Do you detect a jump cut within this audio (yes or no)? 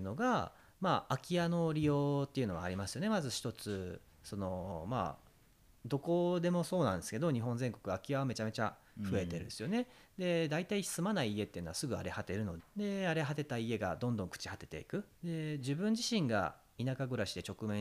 yes